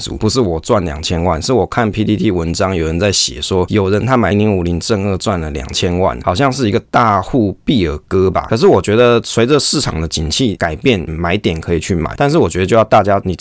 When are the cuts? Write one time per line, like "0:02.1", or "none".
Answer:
0:04.3
0:08.5
0:11.1